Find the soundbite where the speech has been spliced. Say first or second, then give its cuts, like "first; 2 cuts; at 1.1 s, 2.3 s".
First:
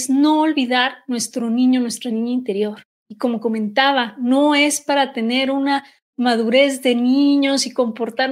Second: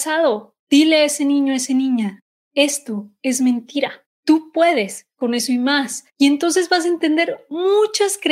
second; 1 cut; at 6.1 s